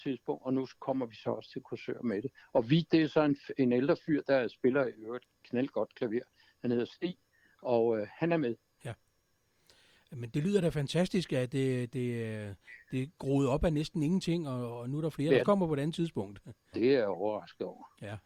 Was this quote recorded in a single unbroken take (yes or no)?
no